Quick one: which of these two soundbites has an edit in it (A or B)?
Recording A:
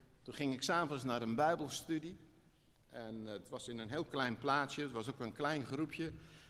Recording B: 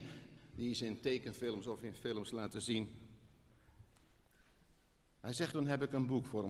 B